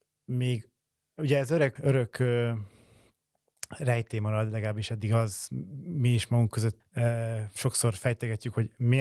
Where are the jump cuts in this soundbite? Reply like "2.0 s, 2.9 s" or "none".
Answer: 1.8 s, 6.8 s